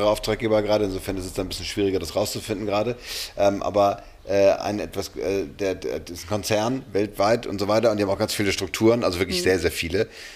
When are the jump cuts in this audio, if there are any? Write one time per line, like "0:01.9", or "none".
none